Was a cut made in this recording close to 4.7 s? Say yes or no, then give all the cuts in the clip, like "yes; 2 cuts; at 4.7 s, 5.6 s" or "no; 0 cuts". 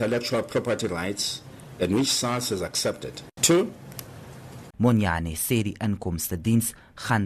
yes; 2 cuts; at 3.4 s, 4.7 s